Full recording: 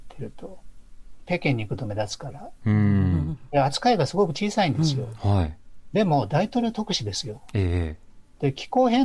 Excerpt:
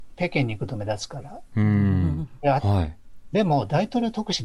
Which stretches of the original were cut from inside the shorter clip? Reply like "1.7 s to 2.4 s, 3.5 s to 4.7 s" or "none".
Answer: 3.7 s to 5.2 s